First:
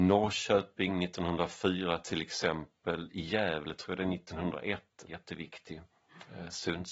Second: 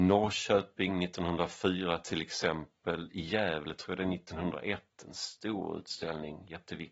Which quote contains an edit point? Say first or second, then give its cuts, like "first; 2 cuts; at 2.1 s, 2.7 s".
first; 1 cut; at 5.1 s